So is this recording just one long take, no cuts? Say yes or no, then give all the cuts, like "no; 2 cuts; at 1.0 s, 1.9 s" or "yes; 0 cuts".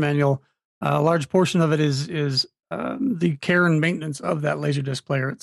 yes; 0 cuts